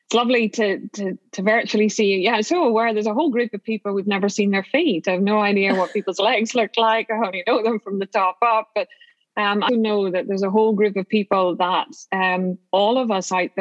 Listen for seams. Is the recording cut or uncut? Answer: cut